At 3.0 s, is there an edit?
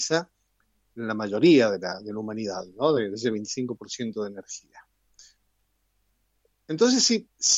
no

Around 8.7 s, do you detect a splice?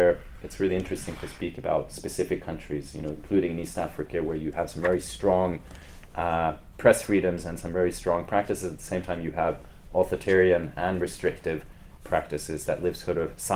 no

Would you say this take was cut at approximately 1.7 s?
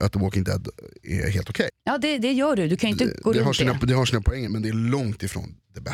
yes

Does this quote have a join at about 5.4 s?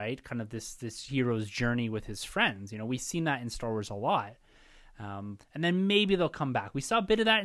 yes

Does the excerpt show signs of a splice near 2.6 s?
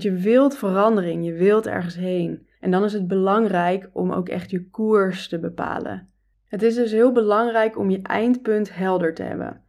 yes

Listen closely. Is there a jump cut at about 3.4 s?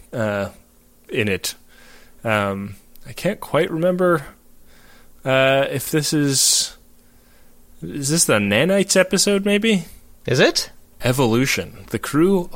no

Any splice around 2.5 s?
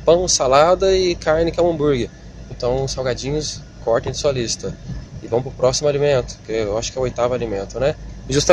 yes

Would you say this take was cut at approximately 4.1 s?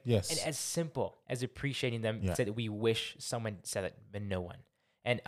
no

